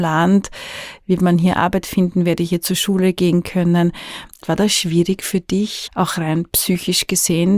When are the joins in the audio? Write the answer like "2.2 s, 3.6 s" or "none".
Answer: 4.4 s, 5.9 s